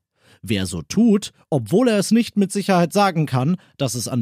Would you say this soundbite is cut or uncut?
uncut